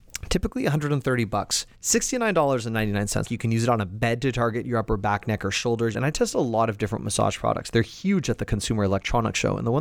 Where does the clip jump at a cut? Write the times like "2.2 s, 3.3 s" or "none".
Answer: 1.7 s, 3.2 s, 5.9 s